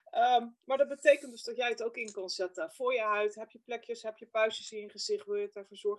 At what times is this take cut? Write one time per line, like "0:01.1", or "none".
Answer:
none

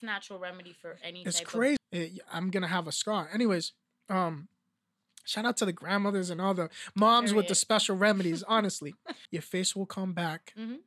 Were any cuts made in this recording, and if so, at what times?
0:01.8
0:09.3

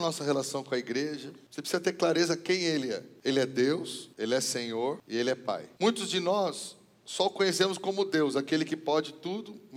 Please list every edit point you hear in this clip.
none

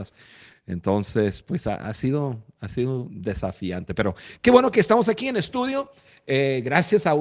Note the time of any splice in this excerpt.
none

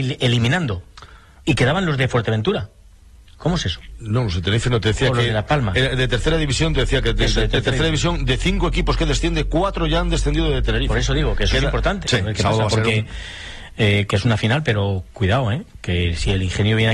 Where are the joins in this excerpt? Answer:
0:12.0
0:14.1

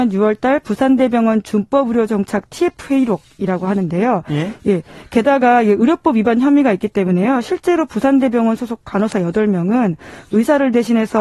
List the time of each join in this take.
0:04.6

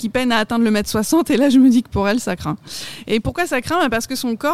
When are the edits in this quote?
none

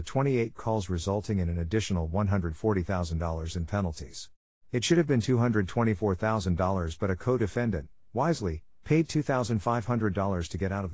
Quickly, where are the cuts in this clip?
0:04.6

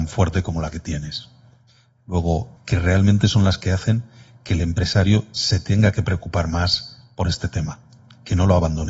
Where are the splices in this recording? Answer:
0:02.6

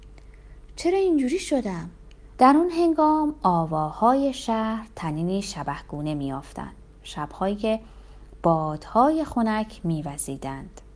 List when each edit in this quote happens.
0:02.3

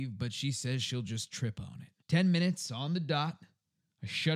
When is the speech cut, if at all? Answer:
0:02.0

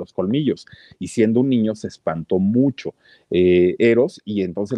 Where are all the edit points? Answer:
none

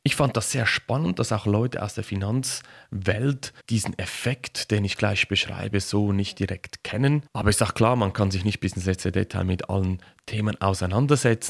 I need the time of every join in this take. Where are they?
0:03.6

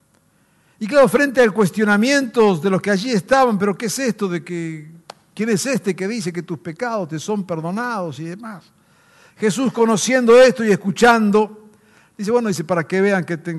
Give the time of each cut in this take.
none

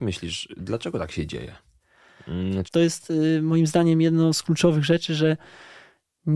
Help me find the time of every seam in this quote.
0:02.6

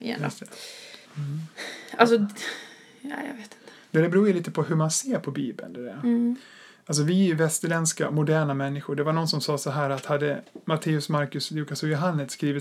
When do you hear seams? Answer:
0:01.0

